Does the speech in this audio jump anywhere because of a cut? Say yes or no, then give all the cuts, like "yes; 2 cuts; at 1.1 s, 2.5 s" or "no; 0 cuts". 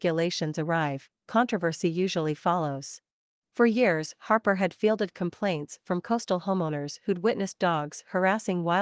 yes; 1 cut; at 3.4 s